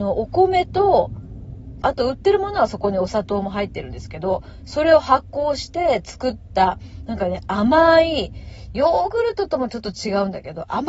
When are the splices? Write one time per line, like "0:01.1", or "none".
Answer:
0:01.8